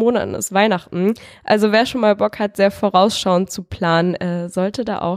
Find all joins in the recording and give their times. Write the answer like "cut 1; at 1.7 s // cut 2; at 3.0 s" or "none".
none